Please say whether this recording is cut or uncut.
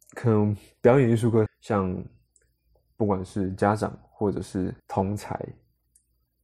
cut